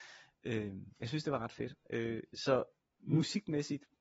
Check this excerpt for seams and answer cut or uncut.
cut